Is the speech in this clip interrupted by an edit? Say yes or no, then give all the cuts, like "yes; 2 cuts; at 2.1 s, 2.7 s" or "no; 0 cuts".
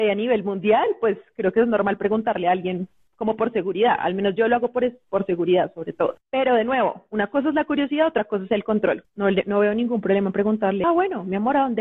yes; 2 cuts; at 9.0 s, 10.8 s